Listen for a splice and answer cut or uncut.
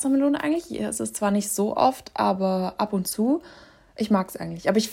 uncut